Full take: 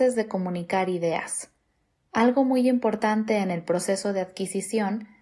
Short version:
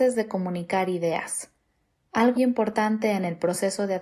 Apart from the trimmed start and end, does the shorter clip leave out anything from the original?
yes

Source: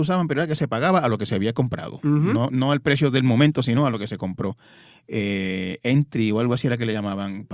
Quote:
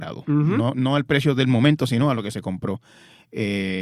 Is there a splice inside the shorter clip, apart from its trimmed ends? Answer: no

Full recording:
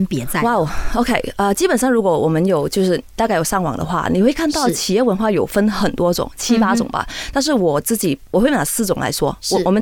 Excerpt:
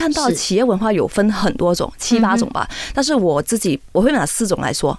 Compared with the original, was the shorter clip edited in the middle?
no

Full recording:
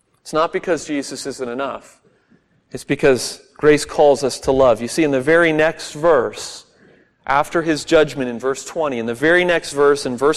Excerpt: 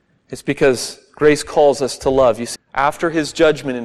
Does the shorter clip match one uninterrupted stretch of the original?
no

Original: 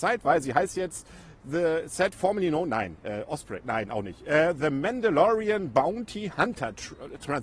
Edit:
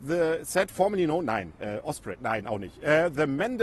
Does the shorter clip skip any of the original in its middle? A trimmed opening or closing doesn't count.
no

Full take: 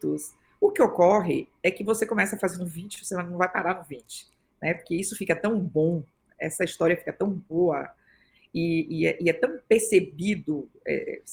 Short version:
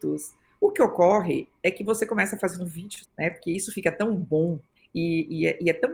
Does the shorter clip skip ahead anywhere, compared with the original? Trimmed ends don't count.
yes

